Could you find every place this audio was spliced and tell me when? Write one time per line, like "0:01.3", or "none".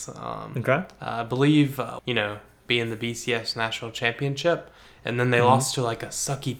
0:02.0